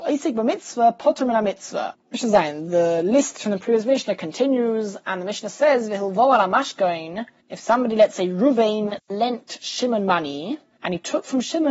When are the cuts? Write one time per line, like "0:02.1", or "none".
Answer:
0:01.9